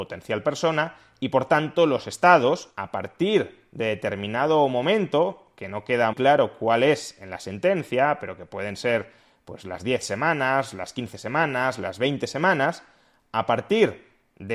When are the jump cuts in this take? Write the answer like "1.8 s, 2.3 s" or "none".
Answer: 6.1 s